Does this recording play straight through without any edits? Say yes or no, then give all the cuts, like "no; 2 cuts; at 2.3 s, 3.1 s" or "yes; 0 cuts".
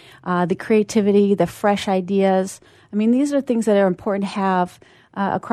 yes; 0 cuts